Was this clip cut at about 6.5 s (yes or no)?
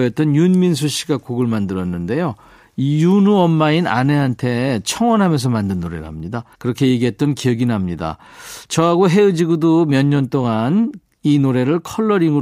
yes